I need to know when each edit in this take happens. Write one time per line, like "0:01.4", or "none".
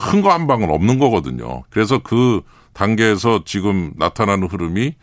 0:01.6